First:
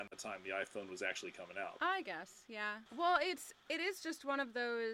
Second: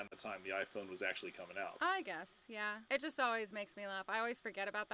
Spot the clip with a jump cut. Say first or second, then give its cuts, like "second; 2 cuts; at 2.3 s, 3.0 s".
first; 1 cut; at 2.9 s